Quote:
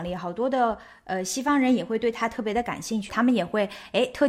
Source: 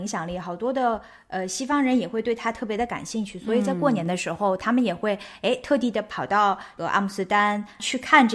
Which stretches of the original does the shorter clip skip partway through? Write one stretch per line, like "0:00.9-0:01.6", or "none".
0:03.3-0:04.6